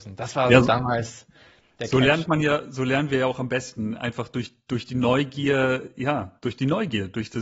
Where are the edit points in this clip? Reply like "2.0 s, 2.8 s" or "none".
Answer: none

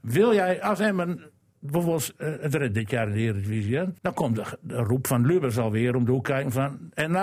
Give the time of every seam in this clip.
4.0 s

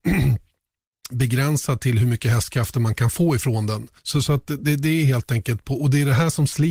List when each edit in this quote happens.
4.0 s, 5.6 s

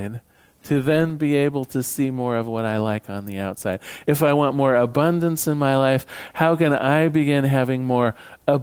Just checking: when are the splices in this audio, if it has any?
4.0 s

